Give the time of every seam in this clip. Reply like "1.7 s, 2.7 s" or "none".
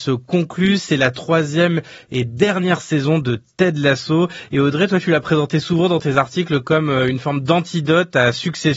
none